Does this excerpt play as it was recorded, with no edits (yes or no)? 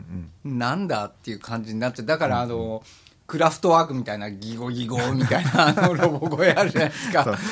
yes